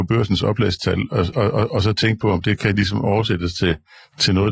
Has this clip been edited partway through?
no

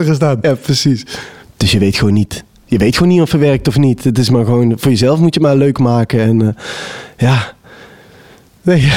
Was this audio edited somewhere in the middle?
yes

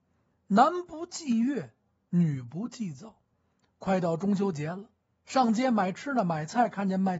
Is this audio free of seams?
no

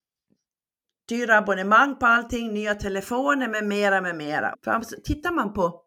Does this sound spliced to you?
yes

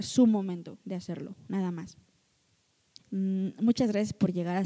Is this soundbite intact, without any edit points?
no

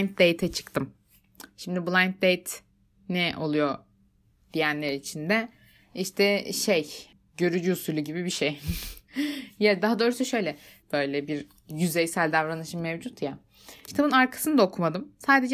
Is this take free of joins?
no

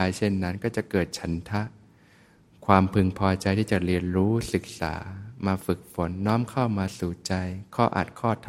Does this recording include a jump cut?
no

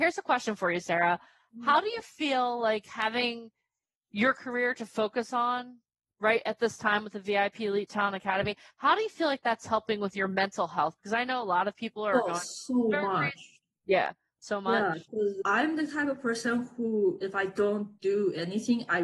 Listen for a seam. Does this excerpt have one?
yes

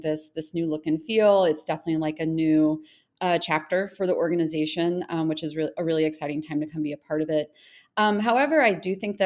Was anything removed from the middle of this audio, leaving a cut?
no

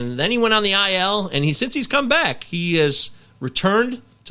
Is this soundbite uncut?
yes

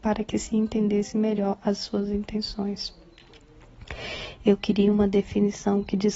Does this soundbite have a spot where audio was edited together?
no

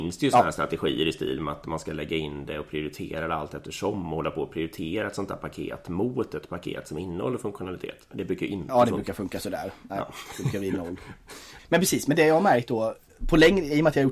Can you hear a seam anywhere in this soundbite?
yes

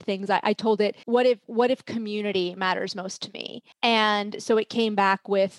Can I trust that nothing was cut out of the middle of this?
no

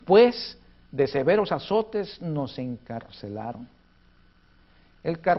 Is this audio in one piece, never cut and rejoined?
yes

